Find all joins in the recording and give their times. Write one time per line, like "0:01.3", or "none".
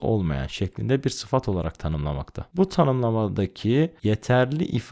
none